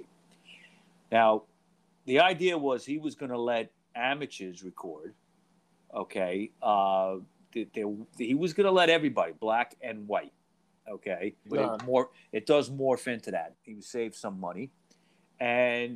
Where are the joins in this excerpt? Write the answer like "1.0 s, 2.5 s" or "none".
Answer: 11.5 s, 13.5 s